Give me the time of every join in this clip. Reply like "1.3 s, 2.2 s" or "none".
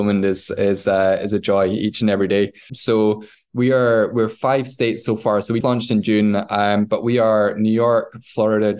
2.7 s, 5.6 s